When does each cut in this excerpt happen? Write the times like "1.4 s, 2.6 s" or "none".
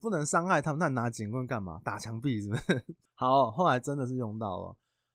3.1 s